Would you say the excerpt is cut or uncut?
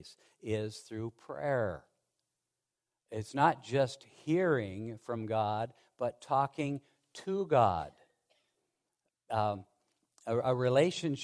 uncut